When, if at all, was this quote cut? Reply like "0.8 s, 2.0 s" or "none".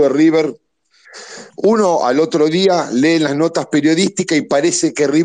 none